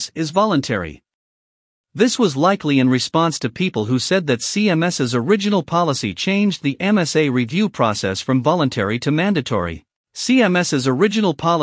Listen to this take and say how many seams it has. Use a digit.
1